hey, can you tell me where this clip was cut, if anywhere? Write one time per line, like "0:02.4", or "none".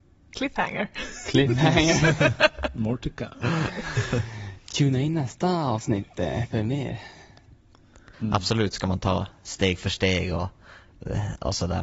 0:08.1

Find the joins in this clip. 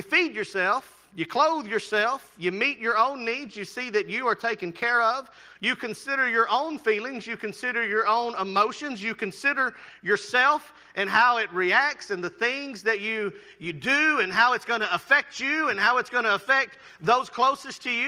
none

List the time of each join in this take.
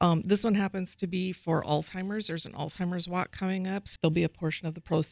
0:04.0

